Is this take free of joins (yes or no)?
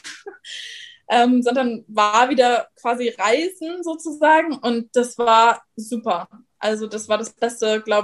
yes